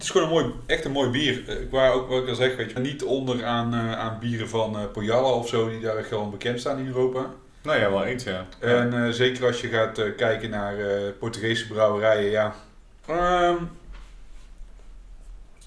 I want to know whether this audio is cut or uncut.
cut